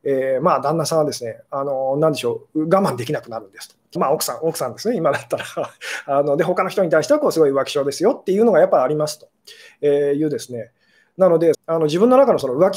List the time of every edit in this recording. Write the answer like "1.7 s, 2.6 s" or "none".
4.0 s, 11.5 s